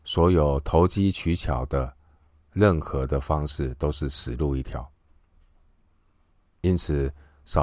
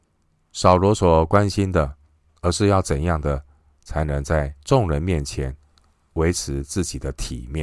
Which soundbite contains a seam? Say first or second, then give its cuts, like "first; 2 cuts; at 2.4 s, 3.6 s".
second; 1 cut; at 2.3 s